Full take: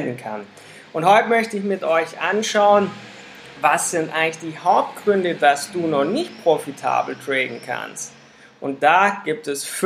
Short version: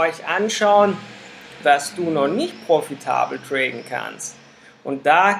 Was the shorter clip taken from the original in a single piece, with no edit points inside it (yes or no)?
no